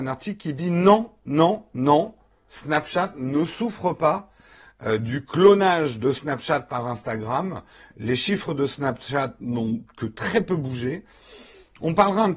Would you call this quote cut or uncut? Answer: uncut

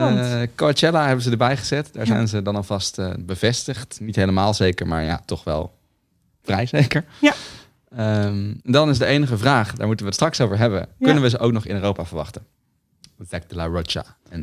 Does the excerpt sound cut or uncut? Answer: cut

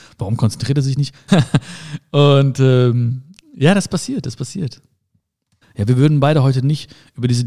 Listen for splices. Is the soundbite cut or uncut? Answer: cut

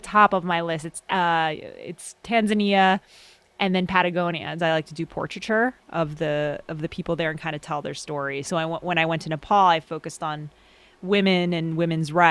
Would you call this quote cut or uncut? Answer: cut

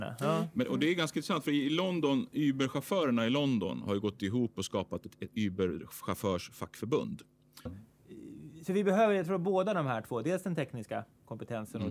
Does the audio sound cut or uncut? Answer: cut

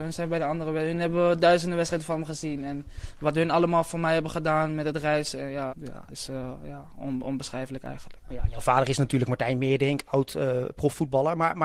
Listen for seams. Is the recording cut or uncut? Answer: cut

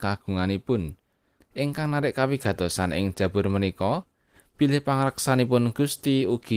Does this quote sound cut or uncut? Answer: cut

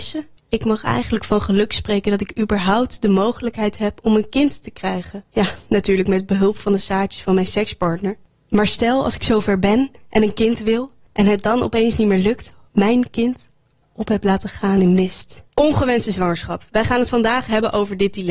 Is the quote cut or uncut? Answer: cut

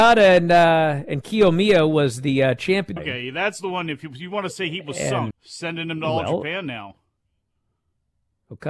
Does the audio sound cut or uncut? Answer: cut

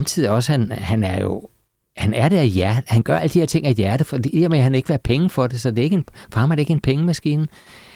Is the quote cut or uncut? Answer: uncut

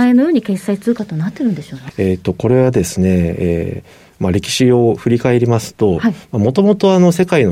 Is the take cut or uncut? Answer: cut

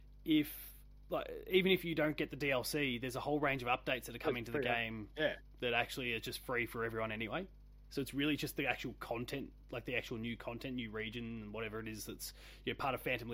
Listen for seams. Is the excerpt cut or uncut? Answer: uncut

